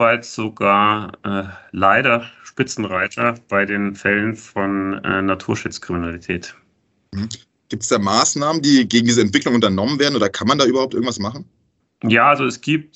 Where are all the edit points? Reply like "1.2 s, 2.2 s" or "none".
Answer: none